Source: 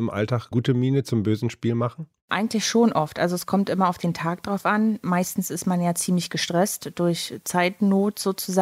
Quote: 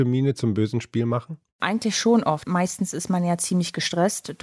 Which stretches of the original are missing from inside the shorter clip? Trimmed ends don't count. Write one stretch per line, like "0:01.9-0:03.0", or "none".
0:03.1-0:05.0